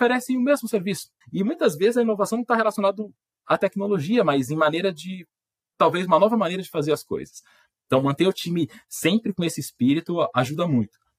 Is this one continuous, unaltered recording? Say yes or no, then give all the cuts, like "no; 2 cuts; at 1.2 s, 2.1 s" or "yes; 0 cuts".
no; 1 cut; at 1.2 s